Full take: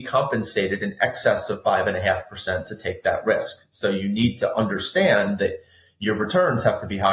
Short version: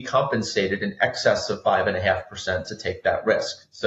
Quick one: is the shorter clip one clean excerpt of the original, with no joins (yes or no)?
yes